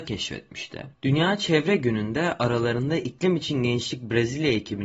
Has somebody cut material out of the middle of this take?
yes; 1 cut; at 0.9 s

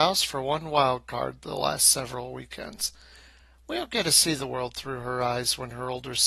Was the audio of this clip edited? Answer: no; 0 cuts

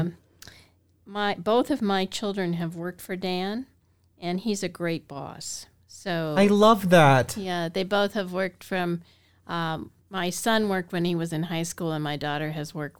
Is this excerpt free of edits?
no; 1 cut; at 10.0 s

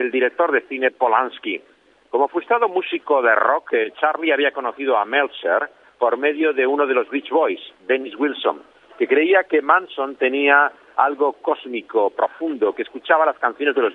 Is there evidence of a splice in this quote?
no; 0 cuts

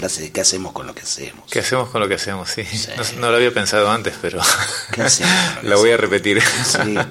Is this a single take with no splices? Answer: yes; 0 cuts

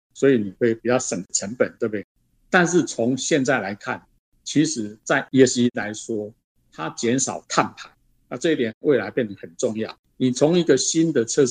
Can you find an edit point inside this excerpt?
no; 0 cuts

